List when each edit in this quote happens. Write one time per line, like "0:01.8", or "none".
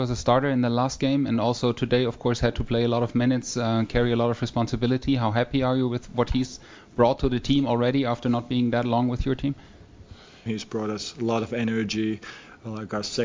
0:10.5